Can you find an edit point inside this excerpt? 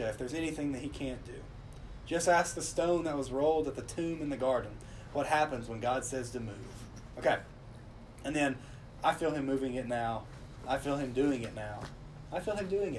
no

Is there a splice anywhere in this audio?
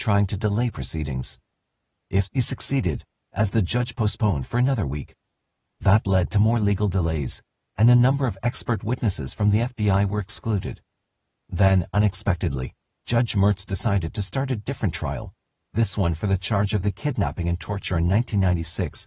yes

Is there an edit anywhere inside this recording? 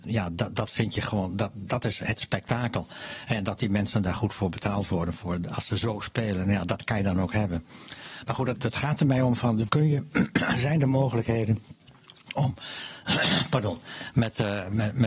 yes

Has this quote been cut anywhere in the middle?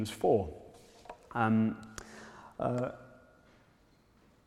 no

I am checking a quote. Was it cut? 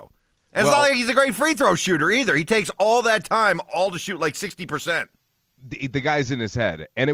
no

